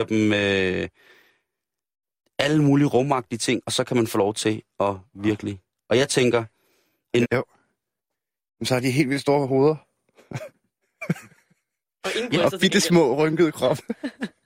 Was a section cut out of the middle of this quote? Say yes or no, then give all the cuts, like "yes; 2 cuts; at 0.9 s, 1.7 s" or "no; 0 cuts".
yes; 1 cut; at 7.2 s